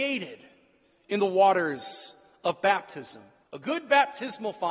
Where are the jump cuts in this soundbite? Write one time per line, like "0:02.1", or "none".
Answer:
0:03.4